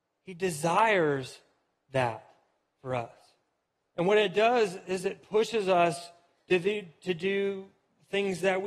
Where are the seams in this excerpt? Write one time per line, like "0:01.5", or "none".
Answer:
0:03.9